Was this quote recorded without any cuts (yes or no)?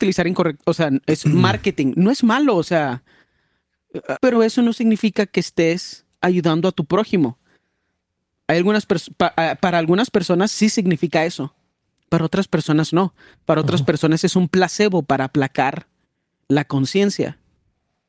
no